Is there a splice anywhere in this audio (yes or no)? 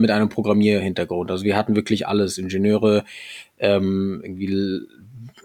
no